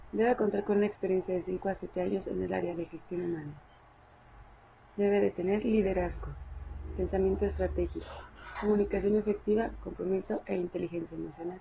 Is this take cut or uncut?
cut